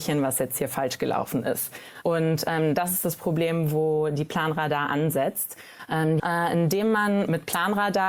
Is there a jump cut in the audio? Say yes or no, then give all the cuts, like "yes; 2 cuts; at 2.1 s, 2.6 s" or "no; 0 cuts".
yes; 2 cuts; at 2.0 s, 6.2 s